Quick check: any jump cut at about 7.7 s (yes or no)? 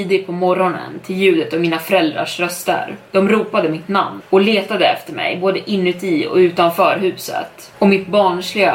yes